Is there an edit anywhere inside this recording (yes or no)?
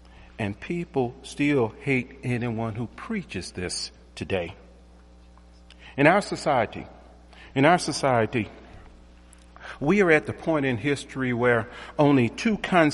no